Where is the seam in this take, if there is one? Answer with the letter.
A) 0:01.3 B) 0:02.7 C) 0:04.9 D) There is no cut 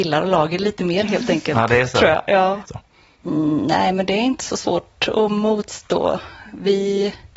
B